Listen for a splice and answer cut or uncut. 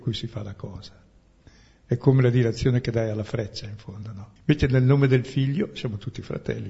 cut